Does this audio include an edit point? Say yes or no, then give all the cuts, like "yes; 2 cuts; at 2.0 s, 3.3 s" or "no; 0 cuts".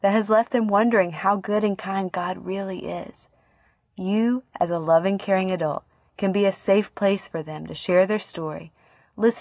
no; 0 cuts